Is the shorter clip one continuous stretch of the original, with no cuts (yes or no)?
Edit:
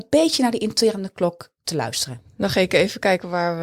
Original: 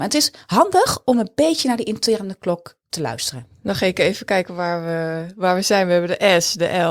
yes